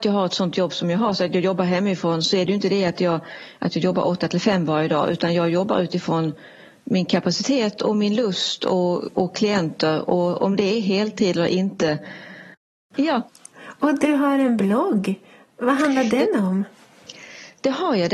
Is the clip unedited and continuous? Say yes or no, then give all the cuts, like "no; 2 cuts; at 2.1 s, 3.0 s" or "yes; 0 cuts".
no; 1 cut; at 12.9 s